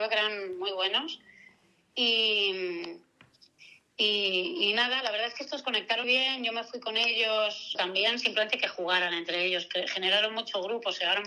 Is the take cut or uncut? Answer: cut